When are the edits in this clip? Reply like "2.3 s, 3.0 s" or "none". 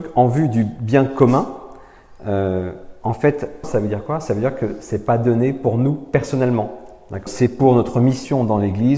3.6 s, 7.3 s